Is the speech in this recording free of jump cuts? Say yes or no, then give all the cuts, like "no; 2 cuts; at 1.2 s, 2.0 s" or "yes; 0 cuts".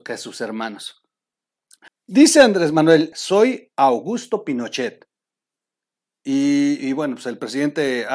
no; 2 cuts; at 1.9 s, 3.1 s